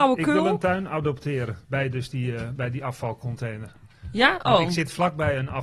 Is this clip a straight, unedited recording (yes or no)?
no